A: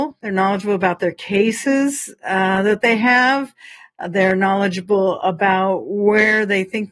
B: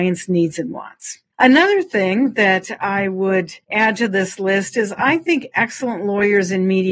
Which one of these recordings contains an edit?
B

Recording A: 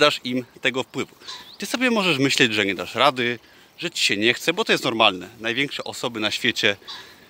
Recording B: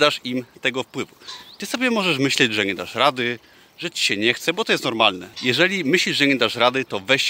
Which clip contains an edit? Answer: B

